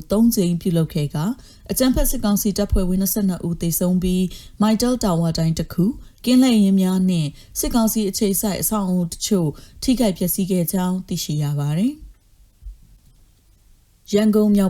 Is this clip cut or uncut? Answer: uncut